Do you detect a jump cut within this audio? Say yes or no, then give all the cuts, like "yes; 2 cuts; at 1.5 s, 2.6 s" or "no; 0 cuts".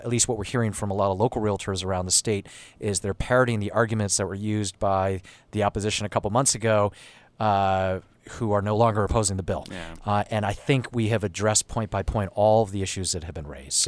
no; 0 cuts